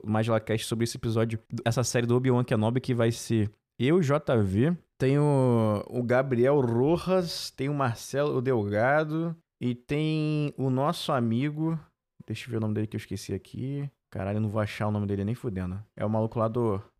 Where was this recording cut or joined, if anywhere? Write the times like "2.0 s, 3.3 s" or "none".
1.6 s